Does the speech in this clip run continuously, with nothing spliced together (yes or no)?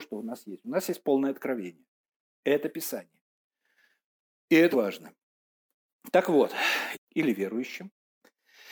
no